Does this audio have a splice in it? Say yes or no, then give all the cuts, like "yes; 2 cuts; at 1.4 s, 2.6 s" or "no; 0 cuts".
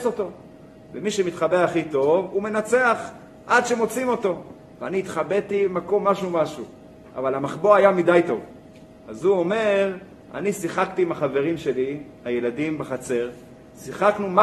yes; 1 cut; at 8.9 s